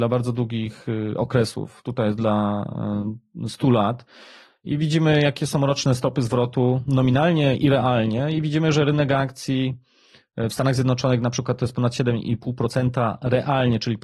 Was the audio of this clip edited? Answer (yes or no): no